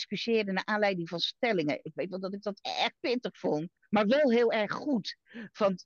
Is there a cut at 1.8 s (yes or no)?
no